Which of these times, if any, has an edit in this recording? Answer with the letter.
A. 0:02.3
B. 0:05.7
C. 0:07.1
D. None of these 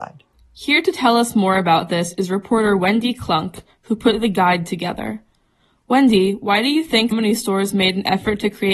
C